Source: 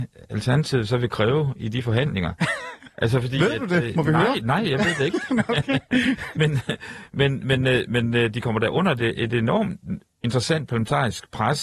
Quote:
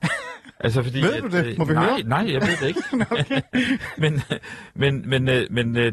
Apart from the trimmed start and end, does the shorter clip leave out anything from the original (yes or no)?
no